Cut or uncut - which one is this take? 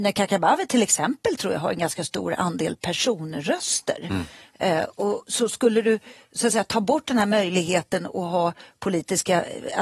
uncut